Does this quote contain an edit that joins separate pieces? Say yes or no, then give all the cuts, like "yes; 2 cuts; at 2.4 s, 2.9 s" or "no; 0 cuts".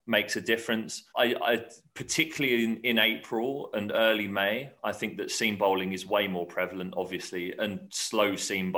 yes; 1 cut; at 1.1 s